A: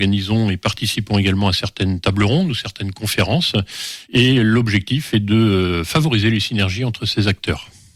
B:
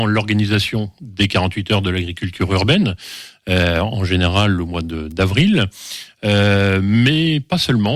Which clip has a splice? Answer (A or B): A